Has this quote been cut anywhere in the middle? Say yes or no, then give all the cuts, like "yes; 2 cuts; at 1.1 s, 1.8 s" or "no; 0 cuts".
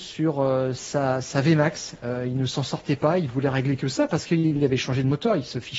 no; 0 cuts